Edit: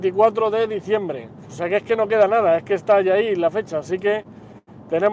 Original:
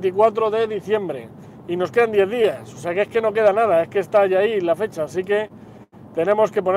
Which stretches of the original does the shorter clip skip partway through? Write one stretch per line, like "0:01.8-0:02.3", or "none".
0:01.5-0:02.7